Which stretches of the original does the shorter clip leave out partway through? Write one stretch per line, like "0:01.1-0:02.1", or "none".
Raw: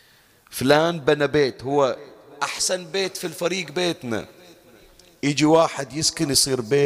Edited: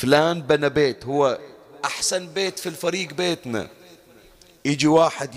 none